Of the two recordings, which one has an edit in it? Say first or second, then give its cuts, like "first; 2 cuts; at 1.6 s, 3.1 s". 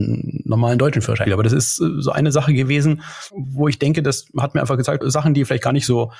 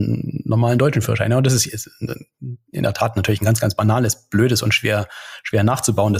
first; 2 cuts; at 1.2 s, 5.0 s